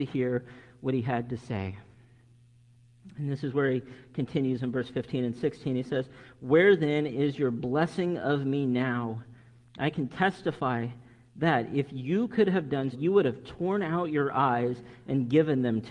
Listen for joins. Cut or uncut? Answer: cut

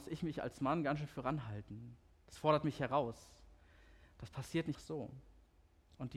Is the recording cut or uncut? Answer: cut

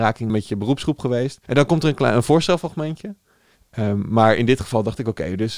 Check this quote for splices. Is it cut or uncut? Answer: cut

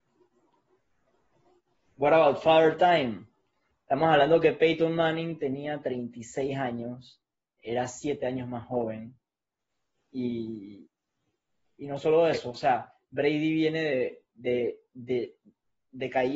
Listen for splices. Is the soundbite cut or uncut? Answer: cut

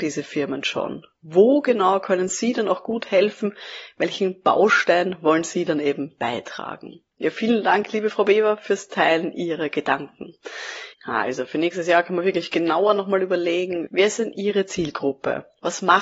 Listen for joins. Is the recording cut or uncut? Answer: cut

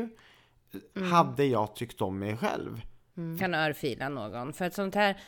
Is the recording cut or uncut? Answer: cut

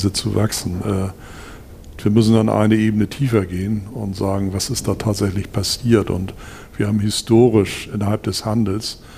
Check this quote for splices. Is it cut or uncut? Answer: uncut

